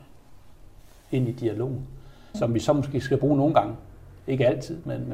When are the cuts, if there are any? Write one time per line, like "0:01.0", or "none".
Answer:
0:02.3